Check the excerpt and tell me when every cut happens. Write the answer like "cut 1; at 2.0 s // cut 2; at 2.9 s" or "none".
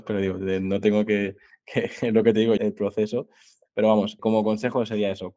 cut 1; at 1.5 s // cut 2; at 2.6 s // cut 3; at 4.2 s